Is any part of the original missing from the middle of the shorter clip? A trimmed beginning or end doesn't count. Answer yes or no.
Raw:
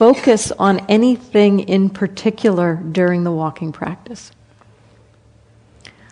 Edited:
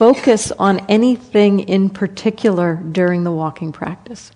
no